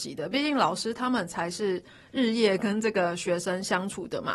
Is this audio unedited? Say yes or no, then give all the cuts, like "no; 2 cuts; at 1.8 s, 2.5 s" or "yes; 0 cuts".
yes; 0 cuts